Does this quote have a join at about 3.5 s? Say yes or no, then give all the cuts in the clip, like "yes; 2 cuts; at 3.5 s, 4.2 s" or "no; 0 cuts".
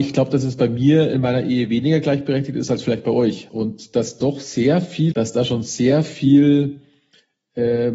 yes; 2 cuts; at 3.5 s, 5.1 s